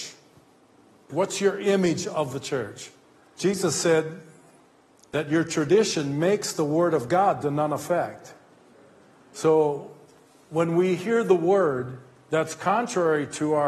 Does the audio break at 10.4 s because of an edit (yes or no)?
no